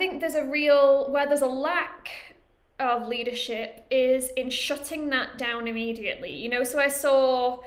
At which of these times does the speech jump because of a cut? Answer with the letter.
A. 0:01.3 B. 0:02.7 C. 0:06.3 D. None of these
D